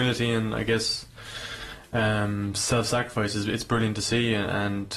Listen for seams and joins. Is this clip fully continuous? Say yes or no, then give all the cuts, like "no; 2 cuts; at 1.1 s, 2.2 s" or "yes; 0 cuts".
yes; 0 cuts